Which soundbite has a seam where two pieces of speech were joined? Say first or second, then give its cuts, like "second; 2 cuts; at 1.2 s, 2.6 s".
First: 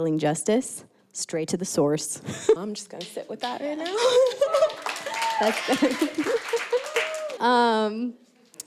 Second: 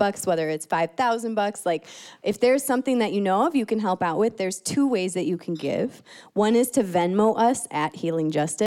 first; 2 cuts; at 2.6 s, 7.4 s